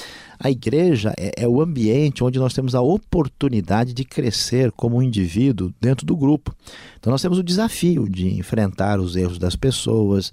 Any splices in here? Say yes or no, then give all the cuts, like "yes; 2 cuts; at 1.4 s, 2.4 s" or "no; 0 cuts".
yes; 1 cut; at 1.2 s